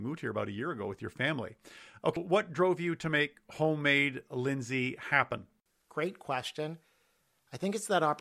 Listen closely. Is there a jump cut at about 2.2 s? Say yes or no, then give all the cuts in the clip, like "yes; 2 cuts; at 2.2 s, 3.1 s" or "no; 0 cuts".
yes; 1 cut; at 2.2 s